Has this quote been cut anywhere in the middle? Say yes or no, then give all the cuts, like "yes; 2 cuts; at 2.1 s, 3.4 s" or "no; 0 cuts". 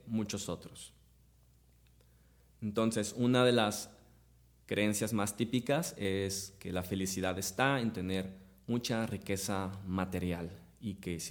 no; 0 cuts